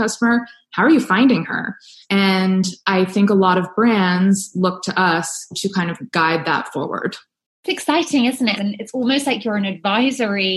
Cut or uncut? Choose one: cut